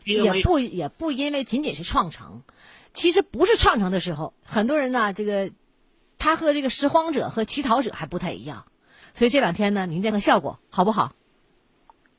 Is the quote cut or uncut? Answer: cut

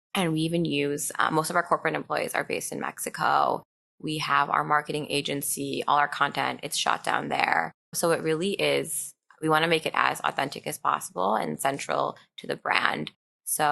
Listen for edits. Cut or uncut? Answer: cut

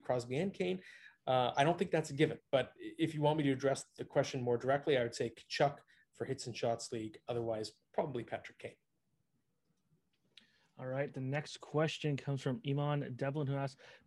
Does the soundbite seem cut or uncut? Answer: uncut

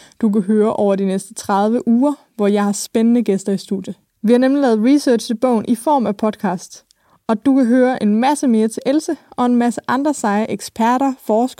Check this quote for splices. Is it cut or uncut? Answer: uncut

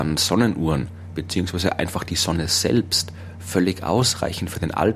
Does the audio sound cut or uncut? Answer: uncut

